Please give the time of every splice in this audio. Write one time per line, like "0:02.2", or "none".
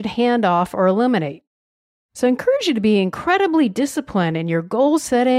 none